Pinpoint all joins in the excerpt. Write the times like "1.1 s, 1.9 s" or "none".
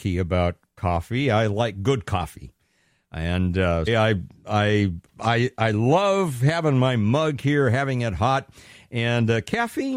3.9 s